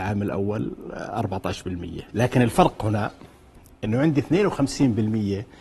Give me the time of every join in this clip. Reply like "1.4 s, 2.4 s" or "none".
2.1 s

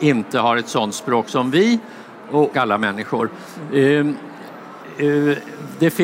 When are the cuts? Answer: 2.5 s

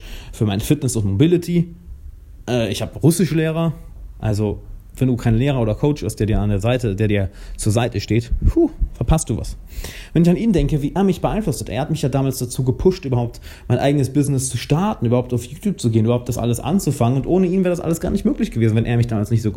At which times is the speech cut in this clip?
11.0 s

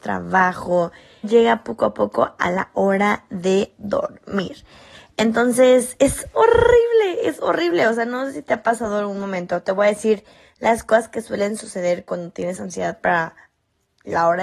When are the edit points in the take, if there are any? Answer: 1.2 s

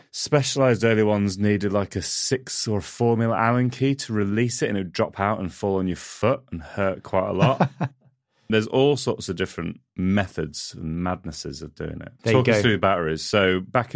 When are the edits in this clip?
8.5 s, 9.9 s, 12.2 s

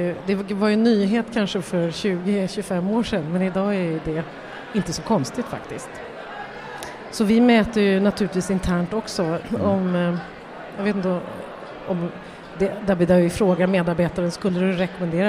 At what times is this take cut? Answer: 9.4 s

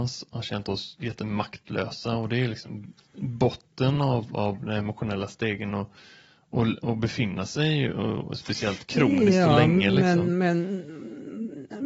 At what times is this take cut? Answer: none

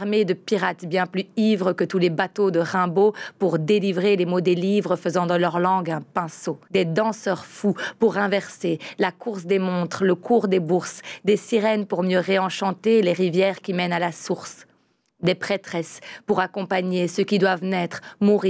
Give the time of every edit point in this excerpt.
6.6 s

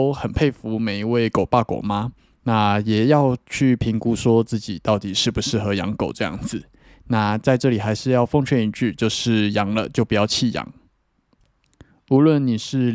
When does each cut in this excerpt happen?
none

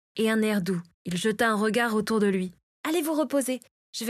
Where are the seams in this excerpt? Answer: 0.9 s, 2.7 s

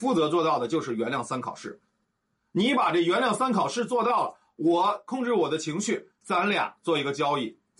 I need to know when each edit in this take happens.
none

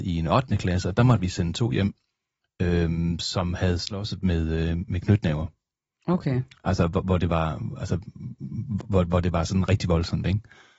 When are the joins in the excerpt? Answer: none

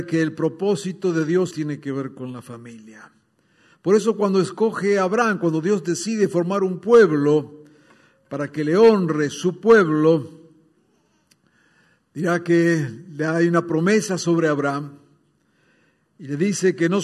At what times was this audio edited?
1.5 s

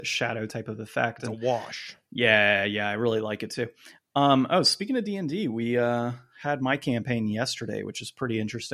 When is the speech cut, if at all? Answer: none

